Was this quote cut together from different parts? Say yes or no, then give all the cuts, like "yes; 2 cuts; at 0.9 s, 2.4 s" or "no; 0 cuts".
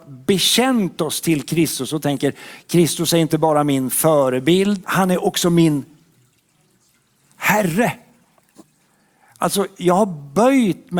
yes; 1 cut; at 4.8 s